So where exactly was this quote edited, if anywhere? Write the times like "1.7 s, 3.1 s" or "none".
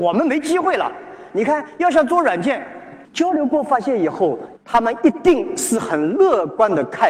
3.0 s, 4.6 s